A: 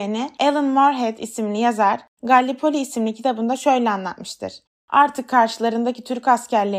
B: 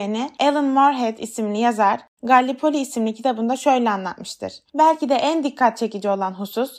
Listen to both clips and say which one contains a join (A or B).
A